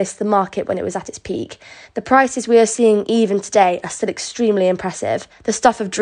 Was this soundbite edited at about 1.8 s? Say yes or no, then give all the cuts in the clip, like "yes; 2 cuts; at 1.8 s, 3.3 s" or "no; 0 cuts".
yes; 1 cut; at 1.8 s